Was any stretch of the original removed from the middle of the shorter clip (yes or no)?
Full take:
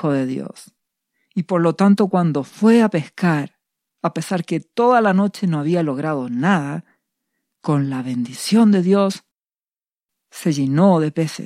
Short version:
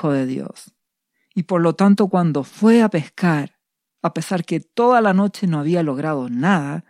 no